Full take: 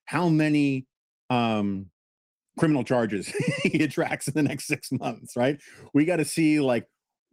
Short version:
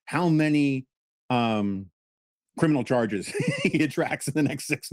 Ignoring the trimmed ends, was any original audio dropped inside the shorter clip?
no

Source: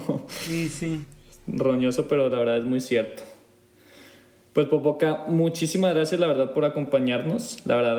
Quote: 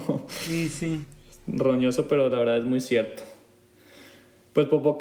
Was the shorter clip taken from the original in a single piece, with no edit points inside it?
yes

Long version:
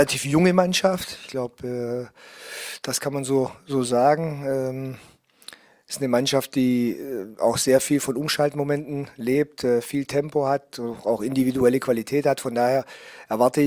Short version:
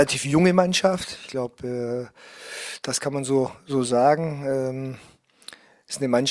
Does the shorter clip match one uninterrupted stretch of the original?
yes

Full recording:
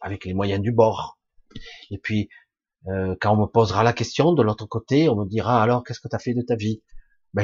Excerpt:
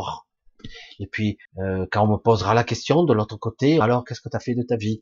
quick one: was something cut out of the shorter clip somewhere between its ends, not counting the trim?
yes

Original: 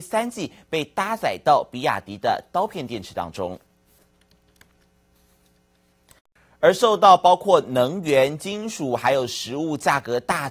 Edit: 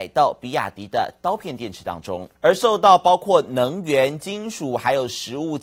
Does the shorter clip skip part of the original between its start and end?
yes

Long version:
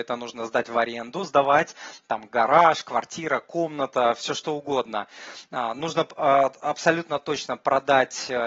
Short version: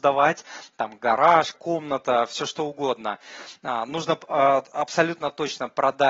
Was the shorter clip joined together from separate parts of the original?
yes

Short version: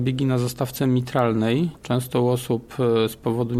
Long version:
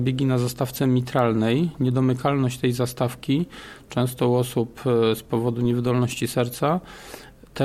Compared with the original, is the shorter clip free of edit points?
no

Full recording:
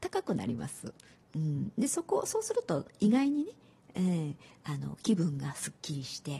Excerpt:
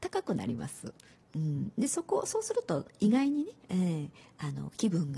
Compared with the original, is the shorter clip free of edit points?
no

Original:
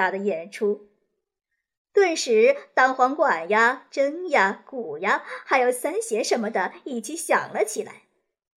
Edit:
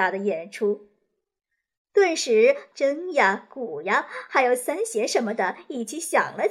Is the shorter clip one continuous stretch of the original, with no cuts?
no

